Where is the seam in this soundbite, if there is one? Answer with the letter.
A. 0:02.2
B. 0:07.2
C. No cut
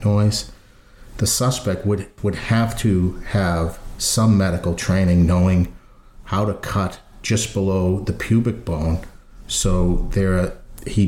A